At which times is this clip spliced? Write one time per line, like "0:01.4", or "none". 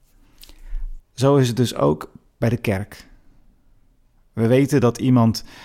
0:01.0